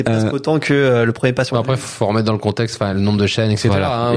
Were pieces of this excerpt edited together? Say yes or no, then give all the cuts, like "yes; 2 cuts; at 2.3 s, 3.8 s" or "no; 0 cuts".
no; 0 cuts